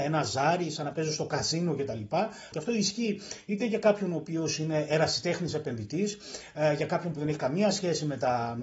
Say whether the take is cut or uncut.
cut